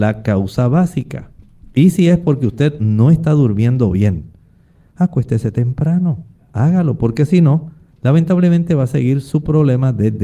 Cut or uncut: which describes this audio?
uncut